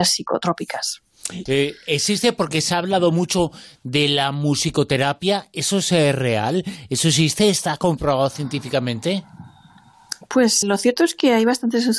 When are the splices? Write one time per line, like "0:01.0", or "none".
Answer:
0:01.5
0:10.6